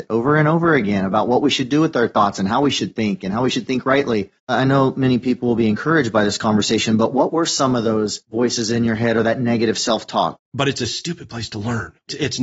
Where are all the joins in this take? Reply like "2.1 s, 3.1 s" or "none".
4.4 s, 10.4 s